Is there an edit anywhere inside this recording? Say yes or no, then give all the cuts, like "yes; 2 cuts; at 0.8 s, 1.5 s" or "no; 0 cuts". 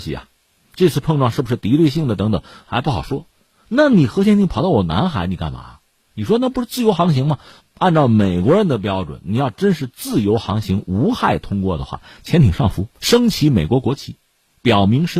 yes; 1 cut; at 12.9 s